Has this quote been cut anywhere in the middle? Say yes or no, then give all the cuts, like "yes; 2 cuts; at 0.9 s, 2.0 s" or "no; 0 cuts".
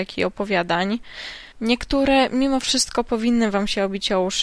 yes; 1 cut; at 1.5 s